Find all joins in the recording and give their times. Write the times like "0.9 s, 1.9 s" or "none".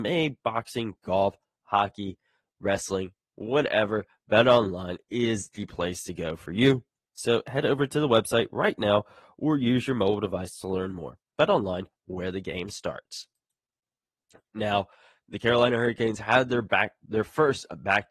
none